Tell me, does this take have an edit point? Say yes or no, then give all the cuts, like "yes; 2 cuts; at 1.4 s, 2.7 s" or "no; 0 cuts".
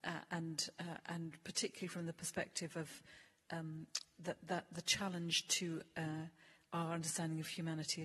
no; 0 cuts